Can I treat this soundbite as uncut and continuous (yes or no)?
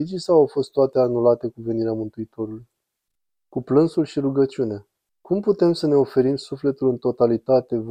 no